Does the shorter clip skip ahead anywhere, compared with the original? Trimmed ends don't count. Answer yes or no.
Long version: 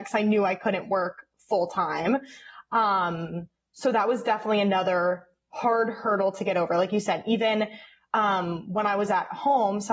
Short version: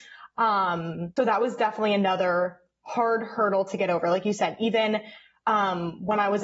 yes